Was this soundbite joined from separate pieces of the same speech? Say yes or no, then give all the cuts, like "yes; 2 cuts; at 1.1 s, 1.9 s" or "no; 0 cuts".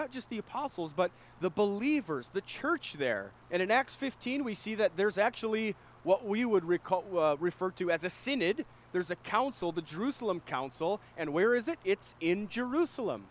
yes; 1 cut; at 3.4 s